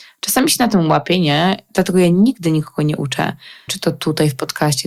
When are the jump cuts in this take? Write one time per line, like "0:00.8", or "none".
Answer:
0:01.7
0:03.7